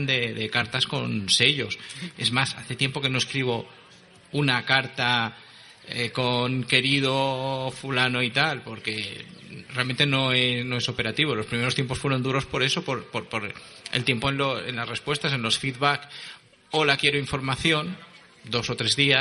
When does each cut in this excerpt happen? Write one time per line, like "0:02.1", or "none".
0:02.1